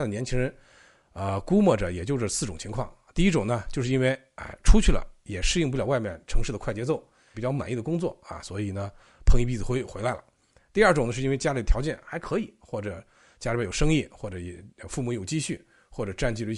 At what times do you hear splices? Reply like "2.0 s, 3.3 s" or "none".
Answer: 7.3 s